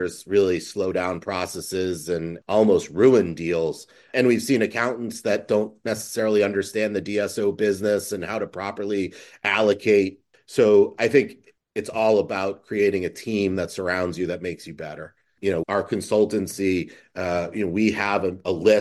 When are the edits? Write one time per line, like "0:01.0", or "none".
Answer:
0:15.6